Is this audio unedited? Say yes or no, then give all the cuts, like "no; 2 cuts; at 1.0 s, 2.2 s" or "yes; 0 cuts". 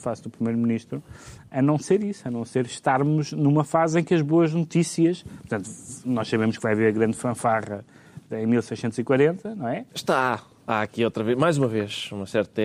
no; 1 cut; at 9.9 s